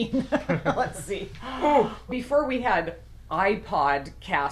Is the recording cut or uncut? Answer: cut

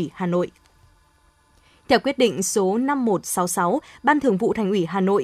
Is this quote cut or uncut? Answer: uncut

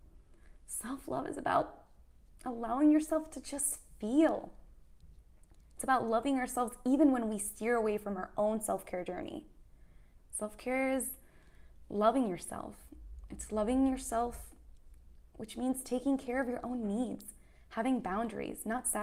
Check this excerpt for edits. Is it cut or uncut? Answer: cut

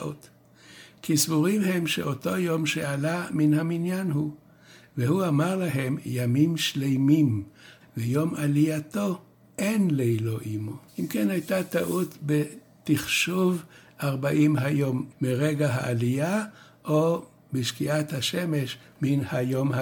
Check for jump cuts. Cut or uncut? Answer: cut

